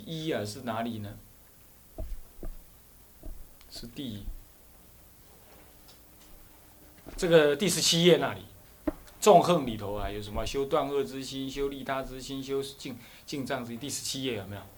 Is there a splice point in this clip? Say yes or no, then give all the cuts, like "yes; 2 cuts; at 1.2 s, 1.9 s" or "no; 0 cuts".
no; 0 cuts